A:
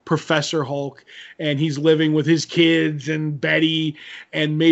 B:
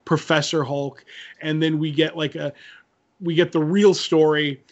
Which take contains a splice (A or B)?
B